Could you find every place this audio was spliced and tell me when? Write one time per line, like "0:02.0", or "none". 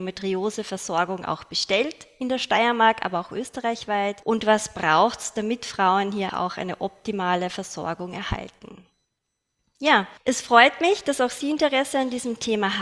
0:06.3